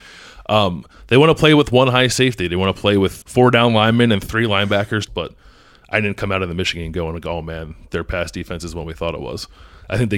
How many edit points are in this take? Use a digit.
2